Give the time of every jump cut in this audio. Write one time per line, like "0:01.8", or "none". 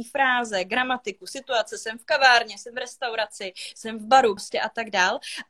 0:04.4